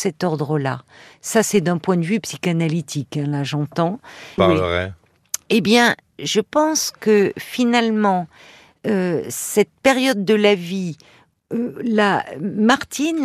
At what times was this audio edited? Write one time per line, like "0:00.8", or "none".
0:04.4

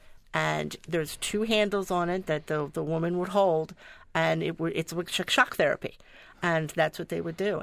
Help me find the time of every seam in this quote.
none

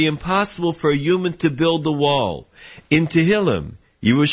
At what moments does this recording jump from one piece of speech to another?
0:02.8

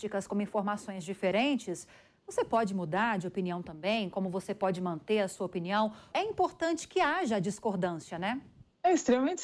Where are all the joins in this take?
0:06.1

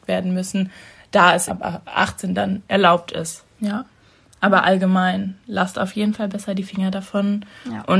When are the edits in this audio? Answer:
0:01.5
0:03.6

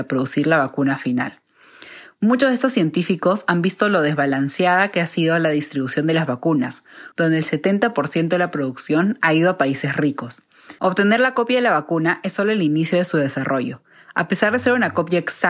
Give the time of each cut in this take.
0:07.1
0:10.8

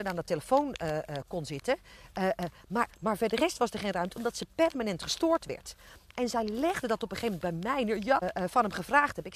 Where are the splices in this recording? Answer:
0:02.9
0:08.2

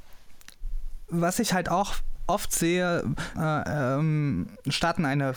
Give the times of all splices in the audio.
0:01.1
0:03.3

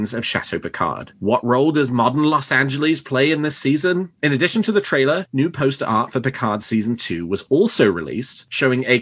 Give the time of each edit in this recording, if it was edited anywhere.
0:04.2

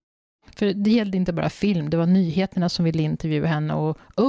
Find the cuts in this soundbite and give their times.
none

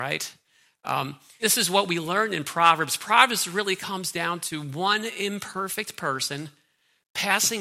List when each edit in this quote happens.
0:01.4

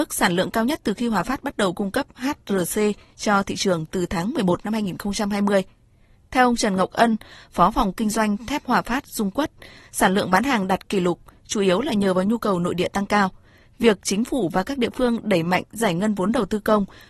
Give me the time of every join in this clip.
none

